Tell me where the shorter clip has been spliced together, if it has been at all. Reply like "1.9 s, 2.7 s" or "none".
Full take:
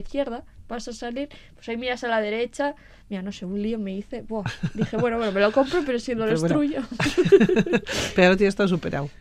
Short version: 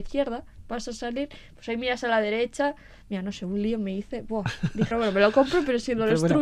4.9 s